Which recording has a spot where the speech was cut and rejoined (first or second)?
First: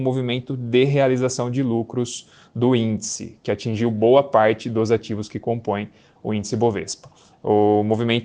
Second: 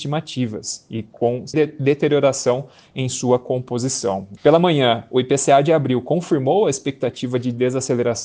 second